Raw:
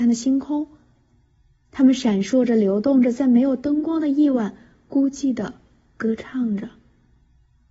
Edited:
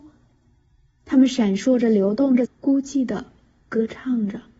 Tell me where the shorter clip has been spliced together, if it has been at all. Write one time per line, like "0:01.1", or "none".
0:02.4